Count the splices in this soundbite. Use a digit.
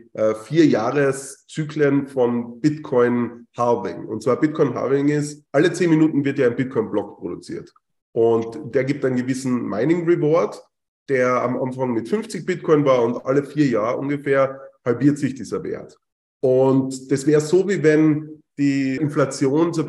1